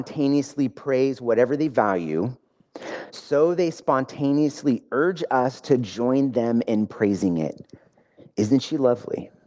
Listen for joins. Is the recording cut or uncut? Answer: uncut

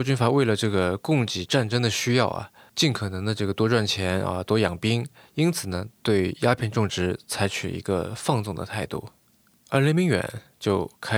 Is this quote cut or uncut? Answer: uncut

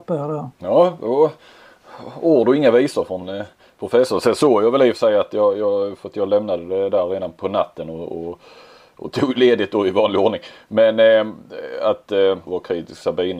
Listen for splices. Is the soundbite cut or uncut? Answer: cut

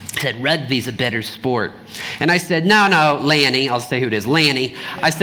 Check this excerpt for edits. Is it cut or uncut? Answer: uncut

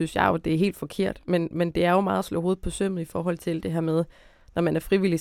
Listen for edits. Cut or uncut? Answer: uncut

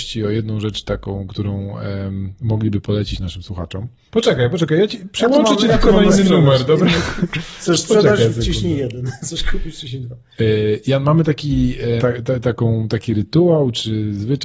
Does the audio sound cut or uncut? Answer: cut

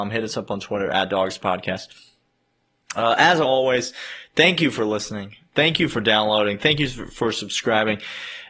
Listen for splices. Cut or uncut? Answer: uncut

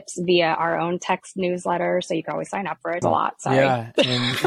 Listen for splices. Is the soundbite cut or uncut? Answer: cut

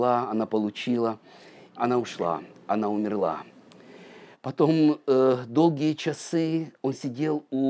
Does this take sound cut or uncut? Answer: cut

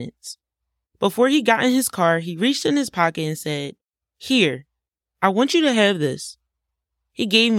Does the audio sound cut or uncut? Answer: uncut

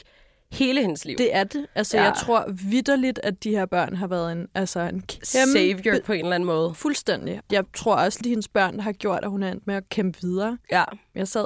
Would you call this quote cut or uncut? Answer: uncut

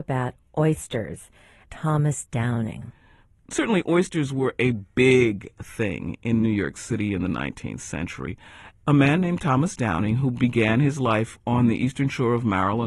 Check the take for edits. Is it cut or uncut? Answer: cut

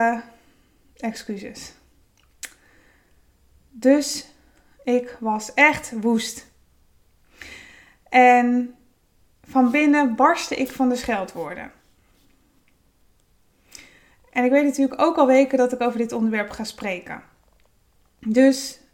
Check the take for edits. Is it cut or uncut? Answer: uncut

